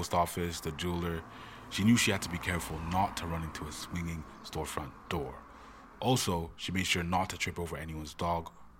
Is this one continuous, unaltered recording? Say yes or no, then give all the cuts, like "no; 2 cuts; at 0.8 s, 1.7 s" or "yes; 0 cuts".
yes; 0 cuts